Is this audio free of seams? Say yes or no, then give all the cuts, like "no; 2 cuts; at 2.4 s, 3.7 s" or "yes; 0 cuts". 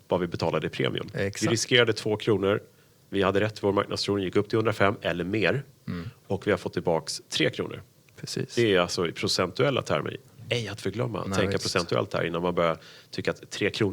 yes; 0 cuts